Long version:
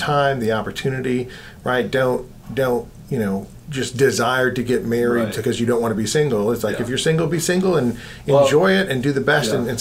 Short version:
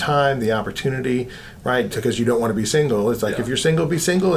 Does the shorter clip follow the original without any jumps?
no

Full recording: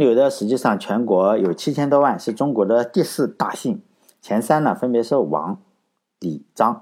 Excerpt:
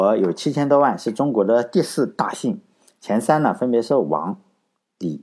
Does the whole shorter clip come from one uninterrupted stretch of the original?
yes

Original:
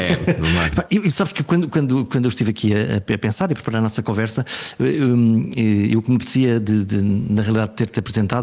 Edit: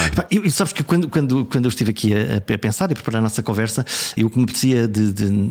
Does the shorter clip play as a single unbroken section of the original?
no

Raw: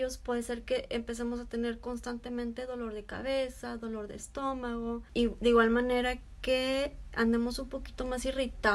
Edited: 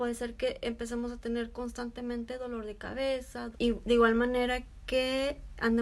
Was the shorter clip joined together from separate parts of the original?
yes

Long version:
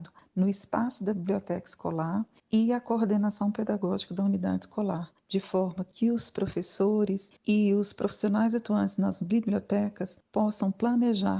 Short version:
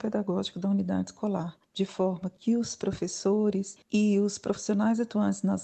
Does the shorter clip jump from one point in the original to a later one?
no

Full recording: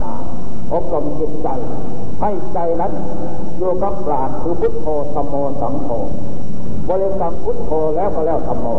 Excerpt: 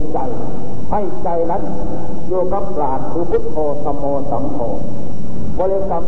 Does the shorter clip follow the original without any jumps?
yes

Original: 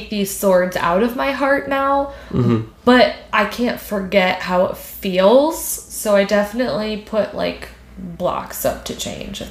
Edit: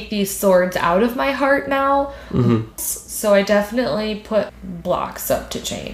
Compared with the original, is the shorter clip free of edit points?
no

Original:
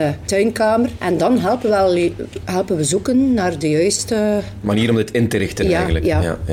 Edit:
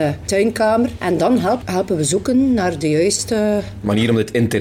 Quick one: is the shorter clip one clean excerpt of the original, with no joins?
no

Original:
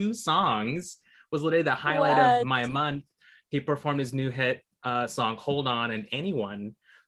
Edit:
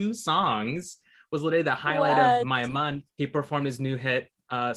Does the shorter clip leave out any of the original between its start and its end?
yes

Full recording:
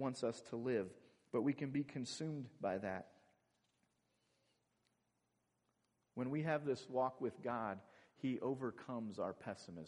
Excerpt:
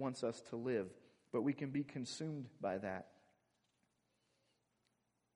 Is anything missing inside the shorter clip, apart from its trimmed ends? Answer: no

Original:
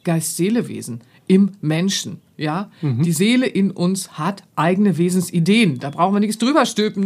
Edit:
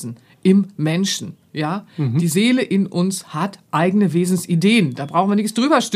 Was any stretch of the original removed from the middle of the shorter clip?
no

